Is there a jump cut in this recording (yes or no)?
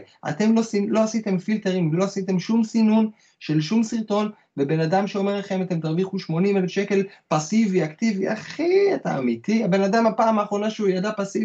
no